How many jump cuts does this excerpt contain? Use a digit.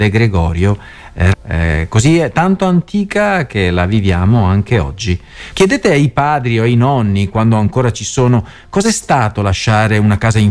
2